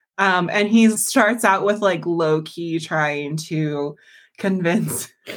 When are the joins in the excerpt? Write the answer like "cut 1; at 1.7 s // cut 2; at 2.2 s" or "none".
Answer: cut 1; at 0.9 s